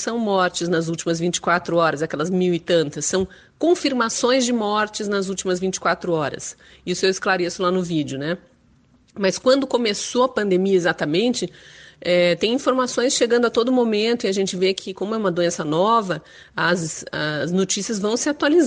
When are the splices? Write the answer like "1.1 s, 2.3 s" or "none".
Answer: none